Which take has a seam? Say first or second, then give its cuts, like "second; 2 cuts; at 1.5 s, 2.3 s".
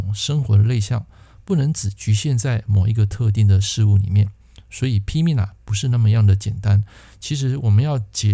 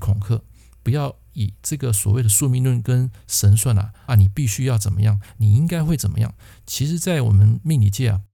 second; 1 cut; at 4.1 s